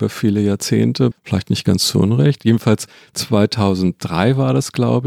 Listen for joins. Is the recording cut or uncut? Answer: cut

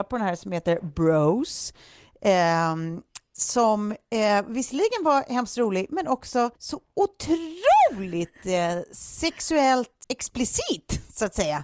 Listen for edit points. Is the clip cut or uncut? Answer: cut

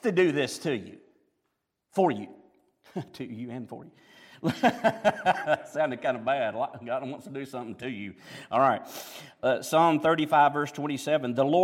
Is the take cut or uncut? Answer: uncut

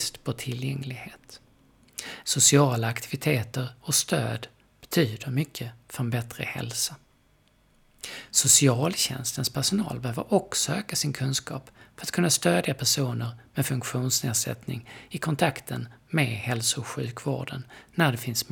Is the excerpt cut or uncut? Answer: cut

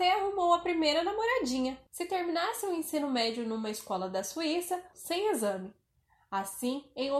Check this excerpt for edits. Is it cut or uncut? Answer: cut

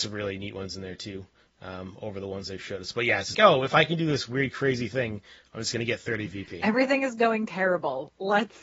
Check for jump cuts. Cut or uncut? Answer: cut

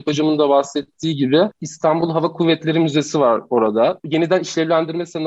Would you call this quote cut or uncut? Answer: cut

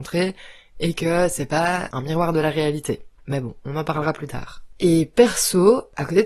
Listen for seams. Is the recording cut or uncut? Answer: uncut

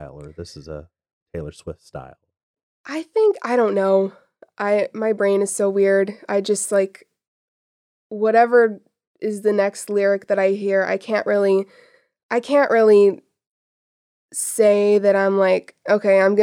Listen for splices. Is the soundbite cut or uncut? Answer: uncut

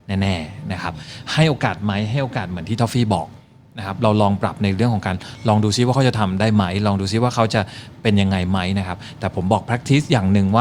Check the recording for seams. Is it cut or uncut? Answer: uncut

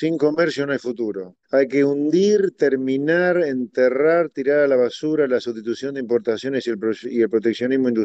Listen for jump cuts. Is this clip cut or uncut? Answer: cut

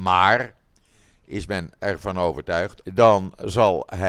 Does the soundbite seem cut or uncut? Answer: cut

